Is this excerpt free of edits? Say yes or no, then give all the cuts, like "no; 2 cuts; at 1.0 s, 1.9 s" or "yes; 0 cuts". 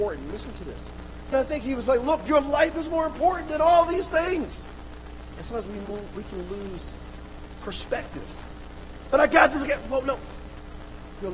no; 1 cut; at 1.3 s